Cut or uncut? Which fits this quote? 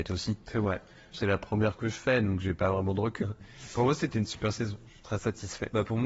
cut